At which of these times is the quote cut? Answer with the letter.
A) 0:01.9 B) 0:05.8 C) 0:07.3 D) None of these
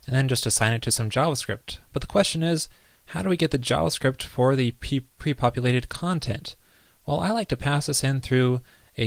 D